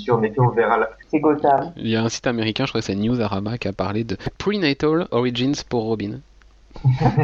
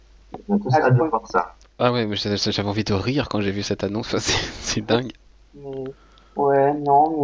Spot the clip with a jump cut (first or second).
first